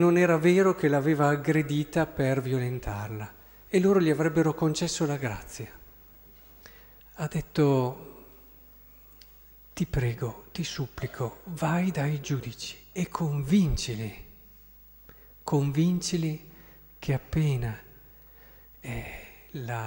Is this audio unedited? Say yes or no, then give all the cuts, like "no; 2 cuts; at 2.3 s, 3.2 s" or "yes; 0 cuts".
no; 1 cut; at 7.0 s